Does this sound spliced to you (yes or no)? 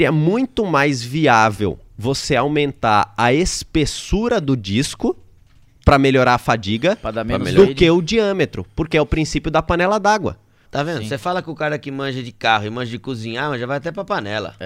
yes